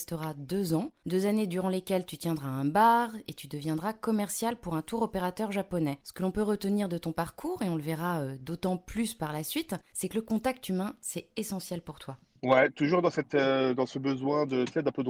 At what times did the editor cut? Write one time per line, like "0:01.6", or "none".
none

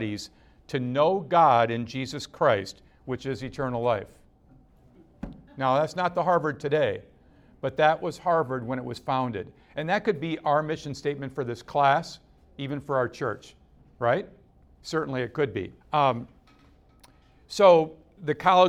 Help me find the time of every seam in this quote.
0:05.5
0:15.8

